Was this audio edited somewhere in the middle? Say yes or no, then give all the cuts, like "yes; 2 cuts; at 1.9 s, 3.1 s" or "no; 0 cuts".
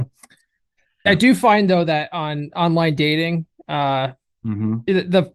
yes; 1 cut; at 1.1 s